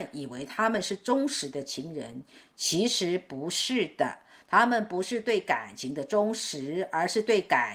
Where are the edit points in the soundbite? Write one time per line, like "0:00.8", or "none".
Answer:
none